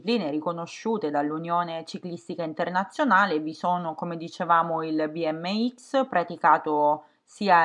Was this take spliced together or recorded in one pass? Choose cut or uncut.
uncut